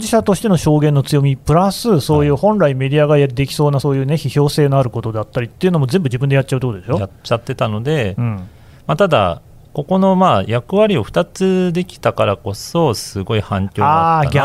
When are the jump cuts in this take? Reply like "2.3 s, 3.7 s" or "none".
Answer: none